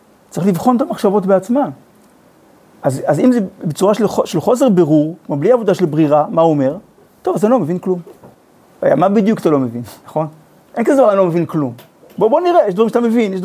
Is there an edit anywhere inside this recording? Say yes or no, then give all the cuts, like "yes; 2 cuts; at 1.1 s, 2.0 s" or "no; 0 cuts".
yes; 1 cut; at 8.3 s